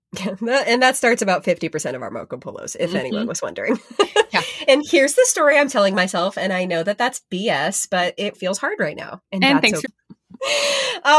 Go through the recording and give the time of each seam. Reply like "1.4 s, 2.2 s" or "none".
8.3 s, 9.8 s